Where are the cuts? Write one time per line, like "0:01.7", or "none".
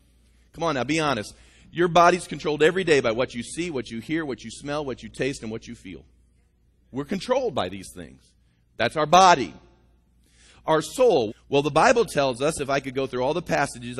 0:11.3